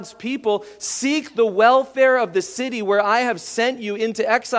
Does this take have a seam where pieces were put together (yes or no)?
no